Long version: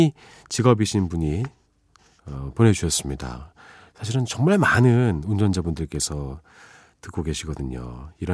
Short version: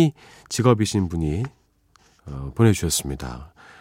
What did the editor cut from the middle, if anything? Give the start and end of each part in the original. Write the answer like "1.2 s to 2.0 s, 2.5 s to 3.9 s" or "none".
none